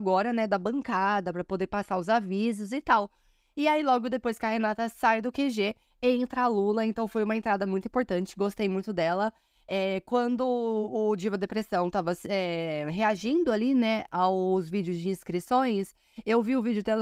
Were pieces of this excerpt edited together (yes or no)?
no